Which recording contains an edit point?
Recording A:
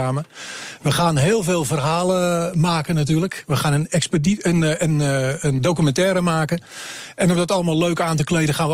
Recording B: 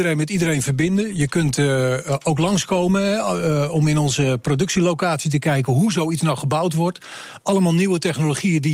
A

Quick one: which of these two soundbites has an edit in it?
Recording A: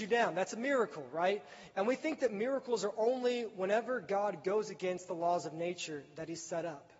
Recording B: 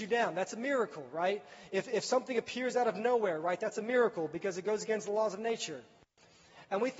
A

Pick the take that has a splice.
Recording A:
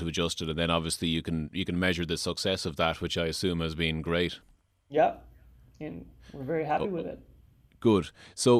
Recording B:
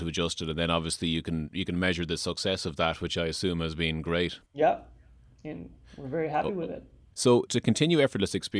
B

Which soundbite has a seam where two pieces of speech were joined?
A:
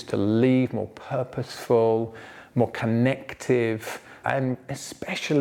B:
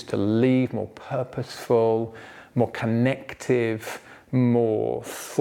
A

